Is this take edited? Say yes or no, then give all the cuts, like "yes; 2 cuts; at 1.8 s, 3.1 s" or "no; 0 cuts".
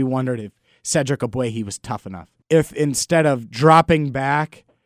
yes; 1 cut; at 2.4 s